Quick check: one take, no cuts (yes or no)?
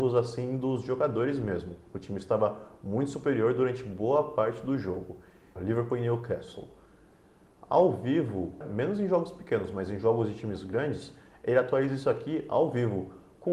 no